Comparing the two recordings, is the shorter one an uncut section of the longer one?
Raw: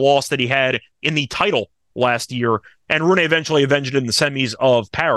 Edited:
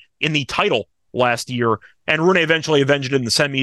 yes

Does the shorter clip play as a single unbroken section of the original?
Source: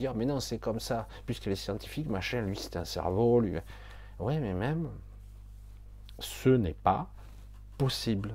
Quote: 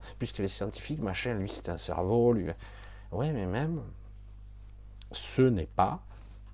yes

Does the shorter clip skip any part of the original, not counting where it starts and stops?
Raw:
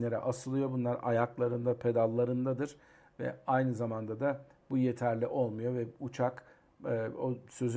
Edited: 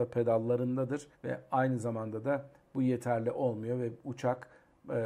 yes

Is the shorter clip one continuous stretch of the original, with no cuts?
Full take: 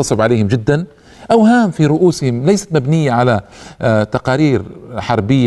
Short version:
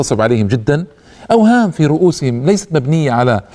yes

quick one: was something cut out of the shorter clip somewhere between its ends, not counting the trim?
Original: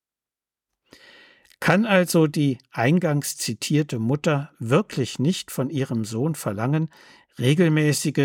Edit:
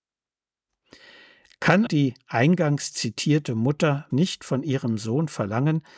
yes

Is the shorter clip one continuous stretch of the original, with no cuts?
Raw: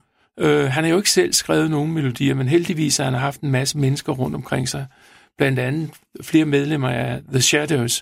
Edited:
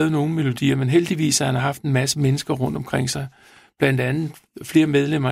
yes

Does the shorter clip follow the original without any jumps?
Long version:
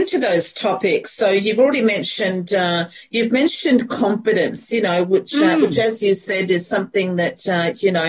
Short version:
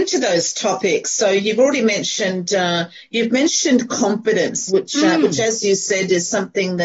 no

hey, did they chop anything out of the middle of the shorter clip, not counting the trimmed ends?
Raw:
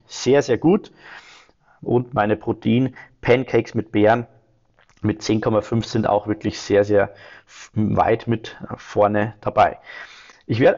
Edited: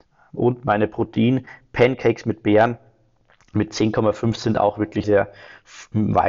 yes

